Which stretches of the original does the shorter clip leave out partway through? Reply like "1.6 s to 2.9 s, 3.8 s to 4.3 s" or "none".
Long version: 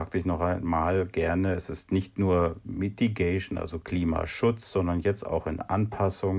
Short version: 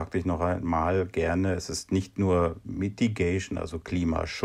none

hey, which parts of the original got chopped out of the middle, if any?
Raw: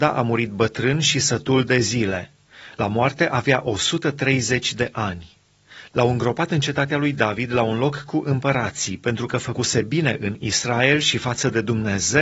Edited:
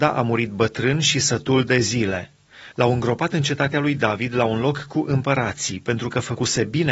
2.7 s to 5.9 s

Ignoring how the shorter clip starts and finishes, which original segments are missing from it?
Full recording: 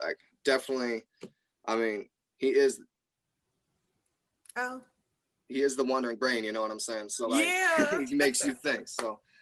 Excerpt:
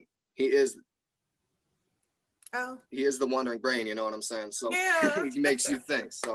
4.9 s to 5.4 s, 7.3 s to 7.5 s

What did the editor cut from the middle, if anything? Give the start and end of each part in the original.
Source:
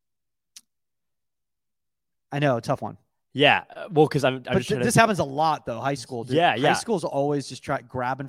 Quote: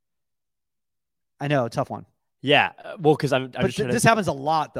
none

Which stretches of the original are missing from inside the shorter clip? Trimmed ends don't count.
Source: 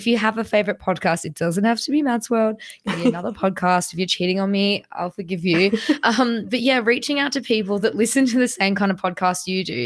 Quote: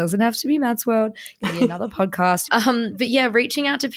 3.9 s to 6.0 s

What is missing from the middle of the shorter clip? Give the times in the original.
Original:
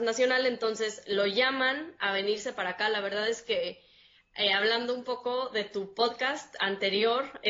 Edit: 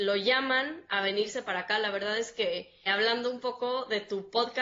4.0 s to 4.5 s

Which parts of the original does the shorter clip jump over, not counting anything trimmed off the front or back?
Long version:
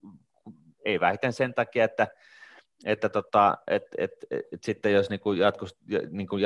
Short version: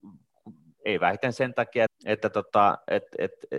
1.9 s to 2.7 s

